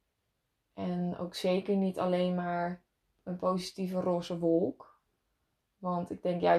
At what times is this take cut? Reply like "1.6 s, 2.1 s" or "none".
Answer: none